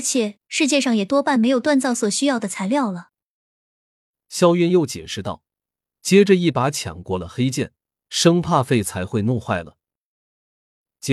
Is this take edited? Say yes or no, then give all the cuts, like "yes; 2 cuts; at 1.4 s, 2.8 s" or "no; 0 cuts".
no; 0 cuts